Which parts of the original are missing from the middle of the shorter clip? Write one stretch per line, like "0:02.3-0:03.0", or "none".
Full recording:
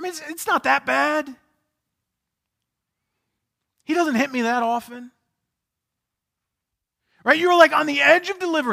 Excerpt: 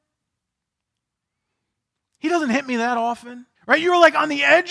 0:05.2-0:07.1